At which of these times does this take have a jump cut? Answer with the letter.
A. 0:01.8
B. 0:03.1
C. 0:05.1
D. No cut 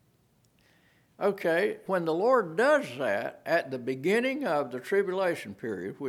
A